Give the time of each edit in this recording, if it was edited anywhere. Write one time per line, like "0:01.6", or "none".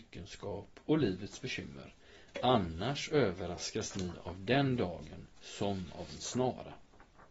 0:05.3